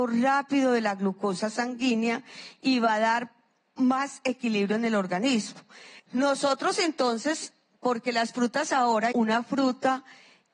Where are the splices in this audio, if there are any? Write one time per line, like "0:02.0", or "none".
0:06.0
0:09.1